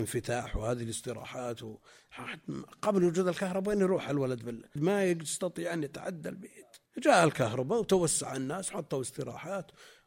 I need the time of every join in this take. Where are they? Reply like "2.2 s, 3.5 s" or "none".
4.8 s, 6.9 s

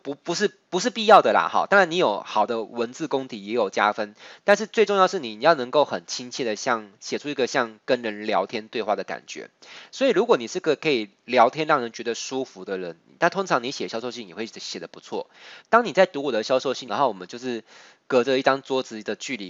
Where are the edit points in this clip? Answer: 15.6 s, 16.9 s

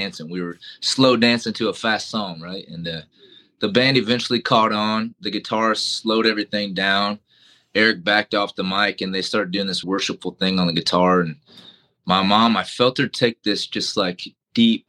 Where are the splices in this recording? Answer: 9.8 s

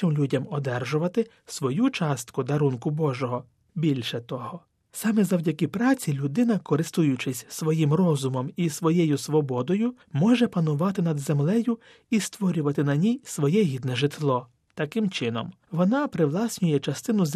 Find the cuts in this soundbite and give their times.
4.9 s

